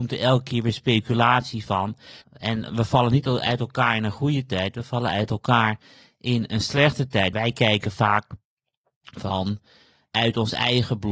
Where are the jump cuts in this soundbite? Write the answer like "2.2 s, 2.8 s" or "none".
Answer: 2.2 s, 7.3 s